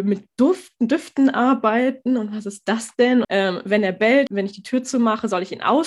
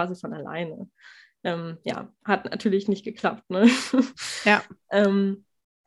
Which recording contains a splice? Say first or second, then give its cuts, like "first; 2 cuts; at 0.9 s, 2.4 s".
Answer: first; 2 cuts; at 3.2 s, 4.3 s